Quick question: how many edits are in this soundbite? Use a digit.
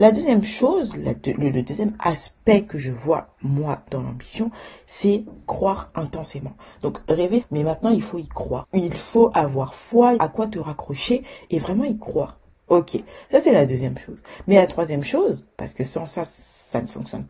3